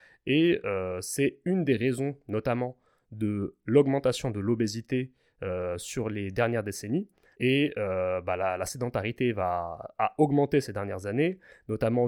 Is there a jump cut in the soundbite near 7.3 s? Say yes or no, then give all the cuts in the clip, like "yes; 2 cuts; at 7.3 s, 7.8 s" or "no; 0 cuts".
yes; 1 cut; at 7.3 s